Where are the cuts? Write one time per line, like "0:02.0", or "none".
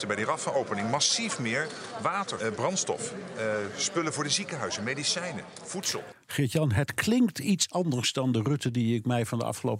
0:02.4